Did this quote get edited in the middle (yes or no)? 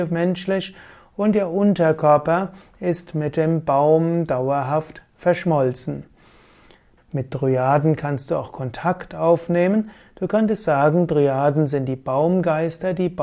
yes